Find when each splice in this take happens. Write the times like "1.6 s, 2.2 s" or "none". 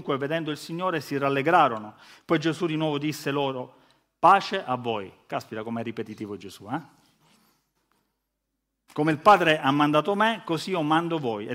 none